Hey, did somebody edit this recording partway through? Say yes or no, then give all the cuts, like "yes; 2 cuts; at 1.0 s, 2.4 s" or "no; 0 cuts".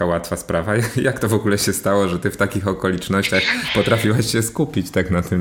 no; 0 cuts